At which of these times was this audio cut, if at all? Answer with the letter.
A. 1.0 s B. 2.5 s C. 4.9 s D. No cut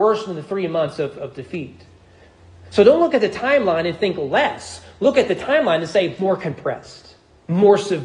D